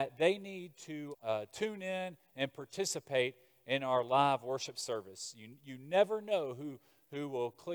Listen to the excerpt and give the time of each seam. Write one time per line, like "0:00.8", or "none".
0:01.1

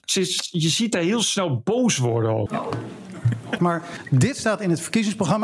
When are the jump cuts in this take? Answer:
0:02.5
0:03.6

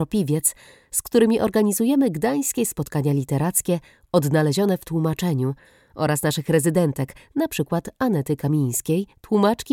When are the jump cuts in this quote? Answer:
none

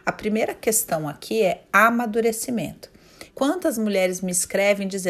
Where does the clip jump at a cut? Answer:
0:03.3

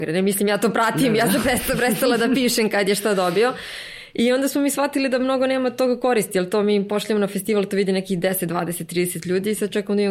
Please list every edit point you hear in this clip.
none

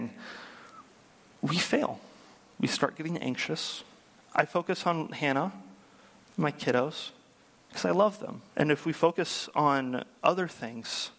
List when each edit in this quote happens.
0:04.2
0:08.5

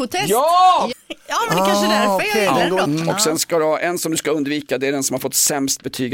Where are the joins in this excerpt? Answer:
0:00.9
0:02.8

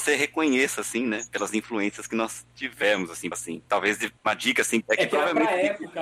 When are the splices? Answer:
0:03.3
0:04.8

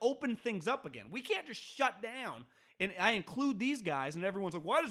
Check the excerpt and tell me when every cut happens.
none

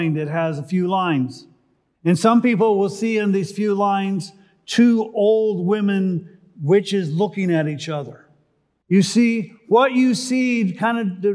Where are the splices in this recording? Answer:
0:01.9
0:08.8

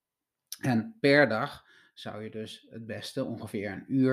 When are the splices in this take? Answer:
none

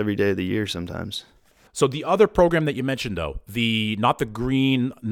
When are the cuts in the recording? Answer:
none

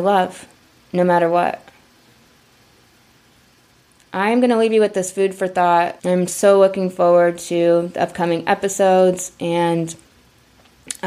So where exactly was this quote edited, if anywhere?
0:06.0

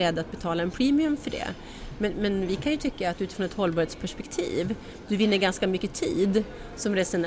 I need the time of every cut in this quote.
none

